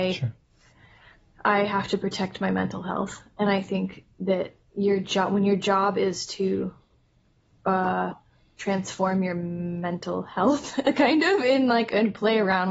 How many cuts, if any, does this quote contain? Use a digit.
0